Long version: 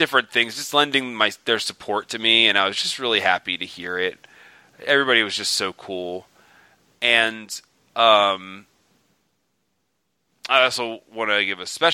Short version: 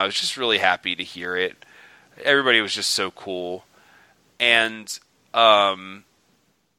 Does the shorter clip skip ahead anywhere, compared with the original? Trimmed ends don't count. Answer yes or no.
no